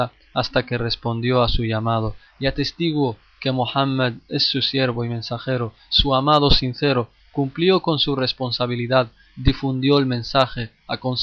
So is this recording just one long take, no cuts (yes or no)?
no